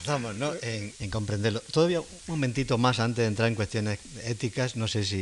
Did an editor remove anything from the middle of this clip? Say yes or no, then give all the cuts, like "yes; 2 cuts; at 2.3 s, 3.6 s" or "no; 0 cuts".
yes; 1 cut; at 0.9 s